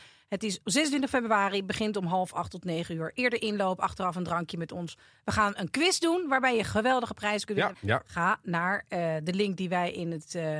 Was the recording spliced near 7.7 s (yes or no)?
yes